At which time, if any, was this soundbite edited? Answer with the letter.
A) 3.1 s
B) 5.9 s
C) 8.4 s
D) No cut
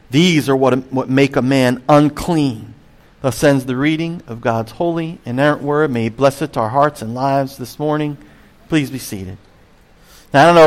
A